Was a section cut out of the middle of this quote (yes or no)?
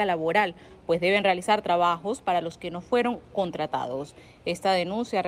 no